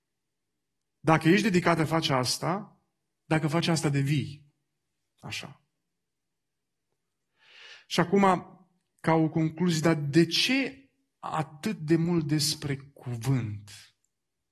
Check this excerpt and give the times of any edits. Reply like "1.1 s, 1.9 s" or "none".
none